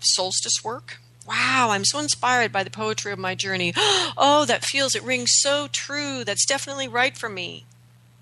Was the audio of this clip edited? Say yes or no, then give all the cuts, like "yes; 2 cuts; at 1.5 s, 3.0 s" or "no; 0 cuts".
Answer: yes; 1 cut; at 1.2 s